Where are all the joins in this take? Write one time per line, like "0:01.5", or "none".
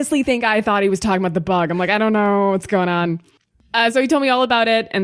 none

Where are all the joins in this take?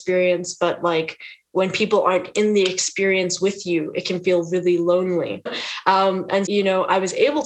0:05.5
0:06.5

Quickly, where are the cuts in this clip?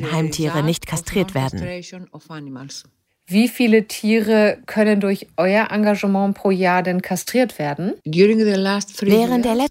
0:08.0

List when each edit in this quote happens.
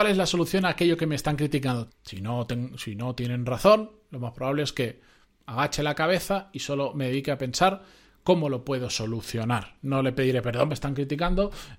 0:01.9
0:10.7

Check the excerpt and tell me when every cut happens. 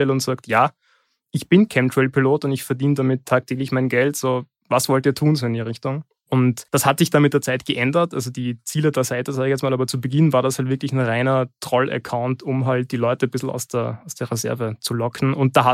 0:06.7

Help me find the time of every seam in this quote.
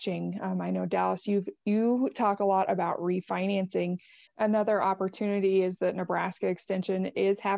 0:04.3

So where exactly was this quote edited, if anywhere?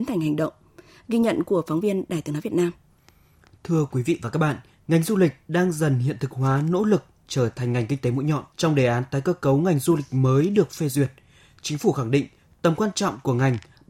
0:08.5

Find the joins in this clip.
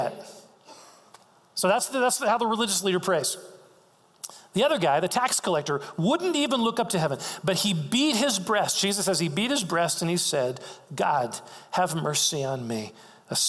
none

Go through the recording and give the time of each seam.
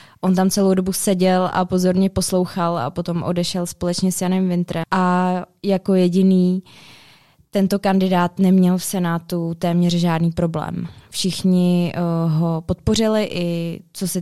0:04.8

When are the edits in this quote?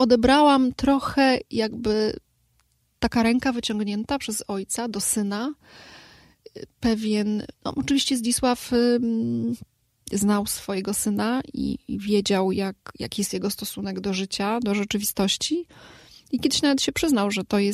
none

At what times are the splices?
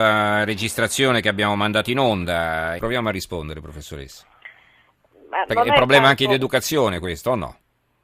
0:02.8

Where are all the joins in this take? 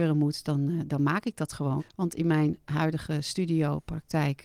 0:01.8

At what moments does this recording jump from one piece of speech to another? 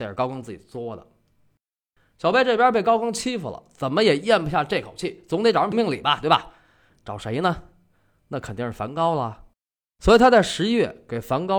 0:05.7

